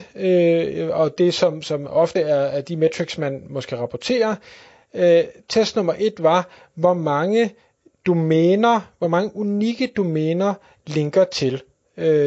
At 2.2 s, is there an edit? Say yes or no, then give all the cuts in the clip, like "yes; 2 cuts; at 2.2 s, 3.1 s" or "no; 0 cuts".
no; 0 cuts